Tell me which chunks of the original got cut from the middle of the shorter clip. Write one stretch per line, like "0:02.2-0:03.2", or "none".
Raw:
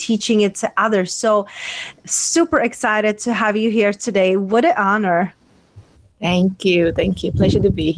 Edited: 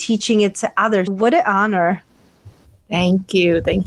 0:01.1-0:04.4

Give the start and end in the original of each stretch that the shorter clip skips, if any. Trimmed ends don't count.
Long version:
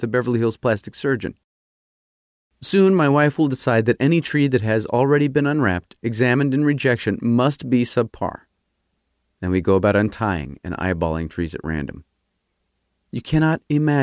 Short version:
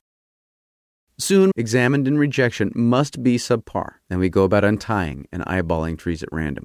0:02.9-0:06.0
0:08.5-0:09.3

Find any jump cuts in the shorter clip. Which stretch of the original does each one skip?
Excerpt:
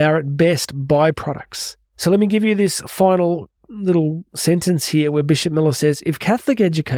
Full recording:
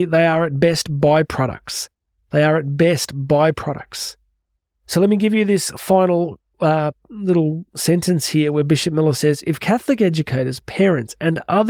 0:04.2-0:04.7
0:06.5-0:07.0

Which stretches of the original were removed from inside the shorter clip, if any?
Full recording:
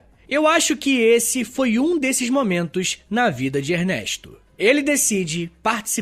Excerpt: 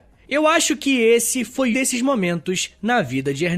0:01.7-0:02.0

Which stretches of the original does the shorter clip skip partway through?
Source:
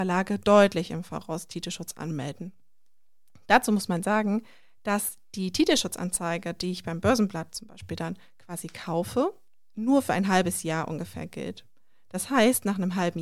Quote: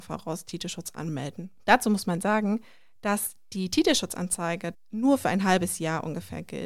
0:02.6-0:03.4
0:06.6-0:09.6

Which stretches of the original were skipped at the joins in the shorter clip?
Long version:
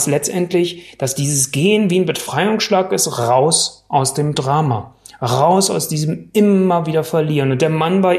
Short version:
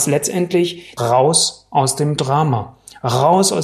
0:01.0-0:03.1

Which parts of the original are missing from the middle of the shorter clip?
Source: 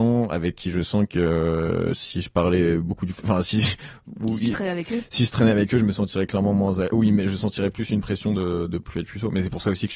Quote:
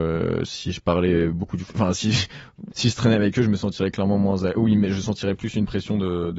0:04.2-0:05.1

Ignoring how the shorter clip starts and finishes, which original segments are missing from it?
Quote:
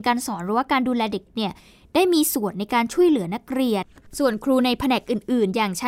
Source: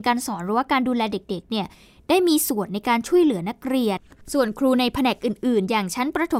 0:01.3-0:01.4

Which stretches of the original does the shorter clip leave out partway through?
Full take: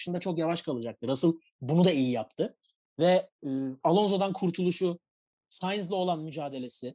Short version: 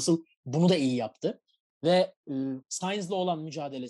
0:03.8-0:05.4

